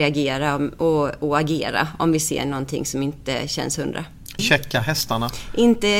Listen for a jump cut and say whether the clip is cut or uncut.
cut